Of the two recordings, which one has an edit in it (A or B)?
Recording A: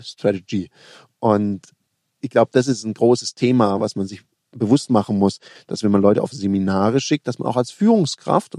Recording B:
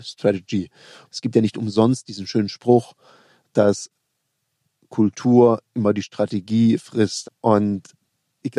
B